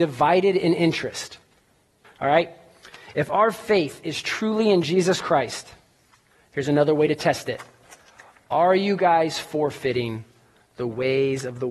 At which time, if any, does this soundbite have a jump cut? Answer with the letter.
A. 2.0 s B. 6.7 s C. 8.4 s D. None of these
A